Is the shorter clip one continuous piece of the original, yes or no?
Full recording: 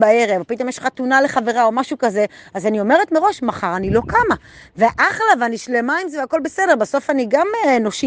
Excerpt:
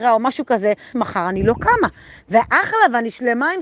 no